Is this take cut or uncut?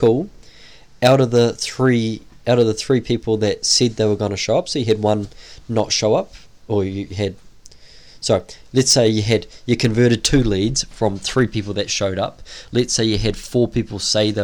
uncut